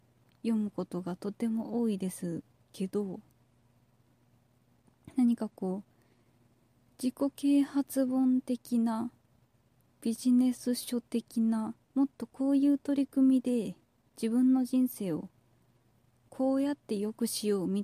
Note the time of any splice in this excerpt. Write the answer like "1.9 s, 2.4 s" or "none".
11.8 s